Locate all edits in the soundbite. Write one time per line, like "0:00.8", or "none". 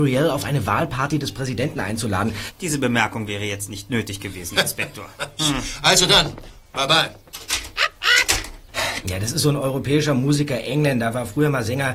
0:02.5
0:05.4
0:09.0

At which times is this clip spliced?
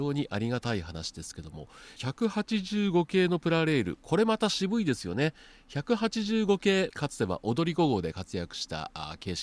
0:02.0
0:06.9

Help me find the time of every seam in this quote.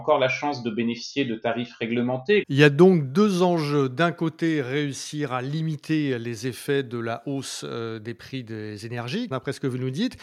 0:02.4
0:09.3

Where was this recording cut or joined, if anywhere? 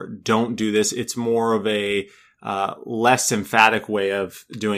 0:00.9

